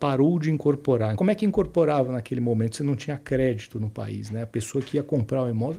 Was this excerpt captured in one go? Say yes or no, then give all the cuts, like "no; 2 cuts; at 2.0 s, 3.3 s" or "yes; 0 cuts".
no; 1 cut; at 1.1 s